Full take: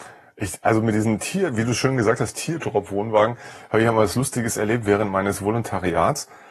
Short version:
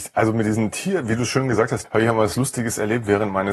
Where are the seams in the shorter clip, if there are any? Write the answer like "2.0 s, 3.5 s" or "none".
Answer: 1.8 s